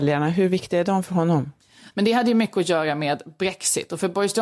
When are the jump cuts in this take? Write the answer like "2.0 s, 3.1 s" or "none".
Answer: 1.9 s